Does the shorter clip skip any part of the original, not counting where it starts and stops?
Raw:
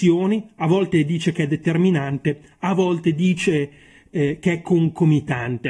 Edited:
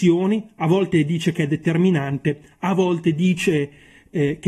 no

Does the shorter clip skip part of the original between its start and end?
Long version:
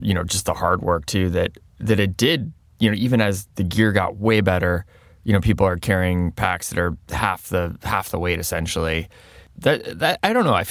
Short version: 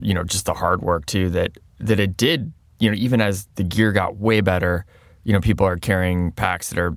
no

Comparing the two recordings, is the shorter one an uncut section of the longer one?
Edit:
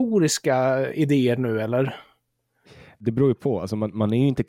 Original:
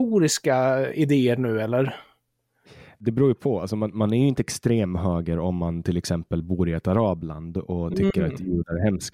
yes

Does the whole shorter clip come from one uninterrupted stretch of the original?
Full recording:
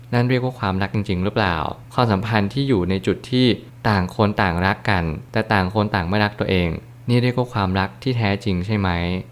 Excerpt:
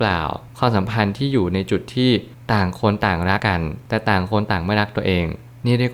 no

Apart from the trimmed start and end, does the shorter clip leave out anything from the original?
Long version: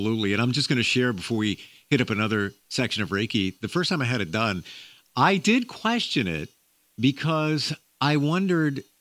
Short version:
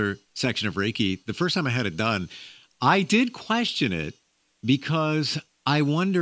no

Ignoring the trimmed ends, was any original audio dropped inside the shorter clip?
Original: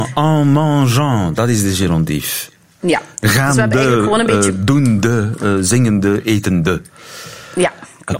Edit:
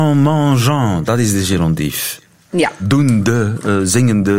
yes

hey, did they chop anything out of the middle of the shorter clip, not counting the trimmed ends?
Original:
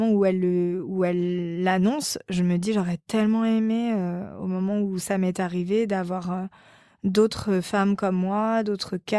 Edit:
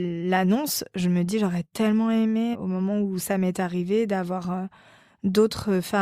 yes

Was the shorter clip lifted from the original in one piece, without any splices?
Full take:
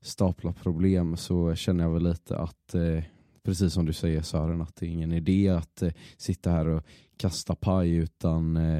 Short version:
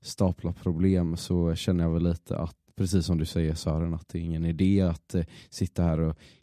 no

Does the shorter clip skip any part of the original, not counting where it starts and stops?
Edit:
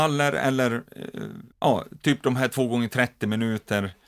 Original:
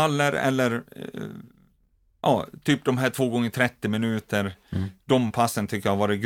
yes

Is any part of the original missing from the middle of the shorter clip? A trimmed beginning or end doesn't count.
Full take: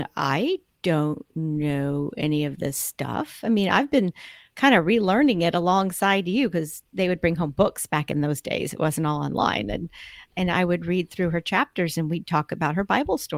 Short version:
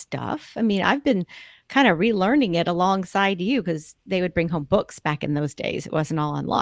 no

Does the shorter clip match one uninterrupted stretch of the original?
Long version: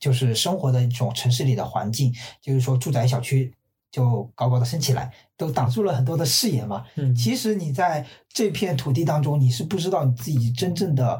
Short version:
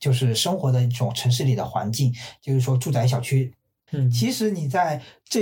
no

